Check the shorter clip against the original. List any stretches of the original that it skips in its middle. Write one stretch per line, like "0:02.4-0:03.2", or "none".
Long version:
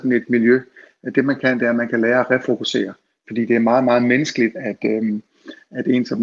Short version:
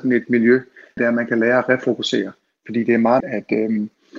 0:01.0-0:01.6
0:03.8-0:04.5